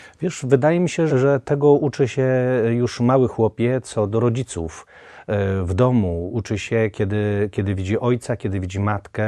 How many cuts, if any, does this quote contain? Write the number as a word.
one